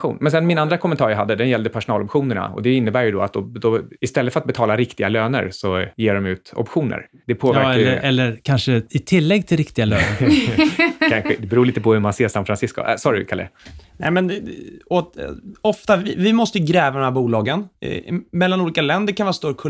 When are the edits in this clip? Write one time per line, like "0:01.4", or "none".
none